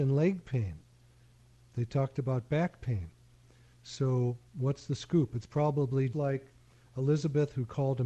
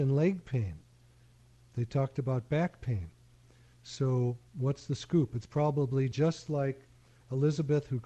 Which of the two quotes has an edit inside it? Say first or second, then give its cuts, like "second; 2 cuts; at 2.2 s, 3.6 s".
first; 1 cut; at 6.1 s